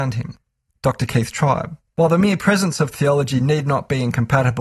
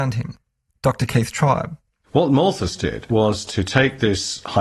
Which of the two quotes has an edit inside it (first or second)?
first